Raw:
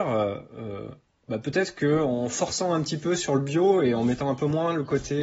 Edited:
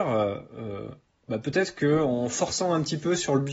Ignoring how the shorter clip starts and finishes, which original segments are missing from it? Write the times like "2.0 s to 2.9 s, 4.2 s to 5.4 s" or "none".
none